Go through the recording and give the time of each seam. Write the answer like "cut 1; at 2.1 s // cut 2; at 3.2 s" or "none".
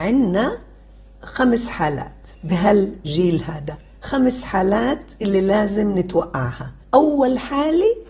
cut 1; at 2.3 s // cut 2; at 6.8 s